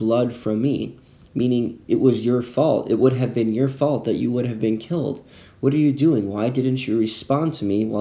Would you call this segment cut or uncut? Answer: uncut